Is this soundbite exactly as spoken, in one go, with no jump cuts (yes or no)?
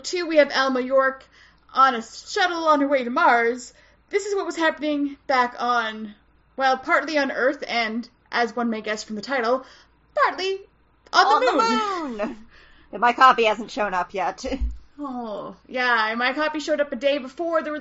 yes